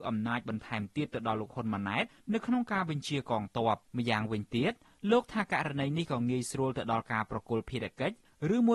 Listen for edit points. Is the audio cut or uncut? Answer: cut